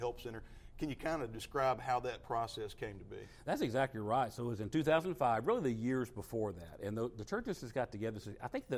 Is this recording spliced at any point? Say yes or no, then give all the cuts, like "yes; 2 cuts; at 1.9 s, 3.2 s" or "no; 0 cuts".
no; 0 cuts